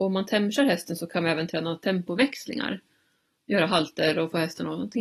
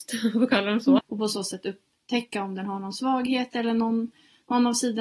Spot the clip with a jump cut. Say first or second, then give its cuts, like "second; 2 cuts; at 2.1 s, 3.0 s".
second; 1 cut; at 1.0 s